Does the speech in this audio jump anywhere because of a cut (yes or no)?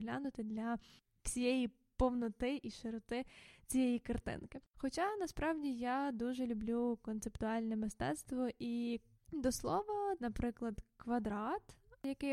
yes